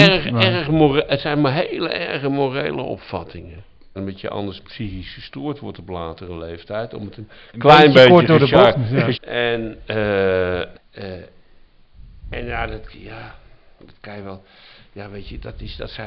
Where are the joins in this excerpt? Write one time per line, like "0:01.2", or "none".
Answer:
0:03.9
0:09.1
0:10.7